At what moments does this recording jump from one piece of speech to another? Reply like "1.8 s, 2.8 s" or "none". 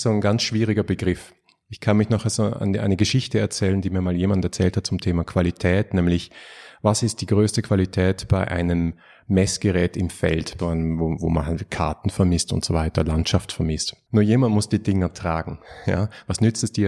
10.6 s, 14.1 s